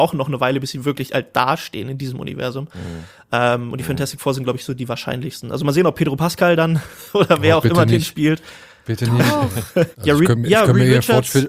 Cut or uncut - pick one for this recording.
cut